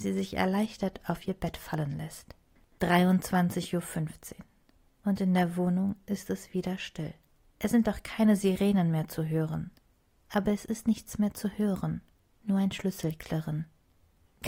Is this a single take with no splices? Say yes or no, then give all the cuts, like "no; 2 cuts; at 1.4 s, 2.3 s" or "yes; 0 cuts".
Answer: no; 1 cut; at 10.1 s